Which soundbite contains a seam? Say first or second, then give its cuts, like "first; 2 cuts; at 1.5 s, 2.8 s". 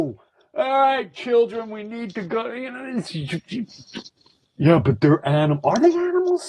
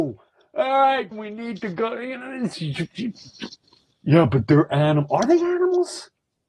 second; 1 cut; at 1.1 s